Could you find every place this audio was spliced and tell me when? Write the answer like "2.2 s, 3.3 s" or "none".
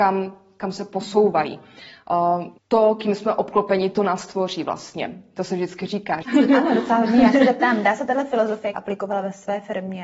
2.6 s, 6.2 s, 8.7 s